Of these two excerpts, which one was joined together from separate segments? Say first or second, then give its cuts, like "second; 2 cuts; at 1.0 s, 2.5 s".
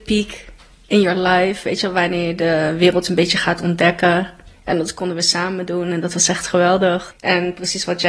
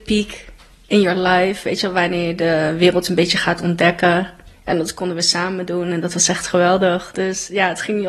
first; 1 cut; at 7.1 s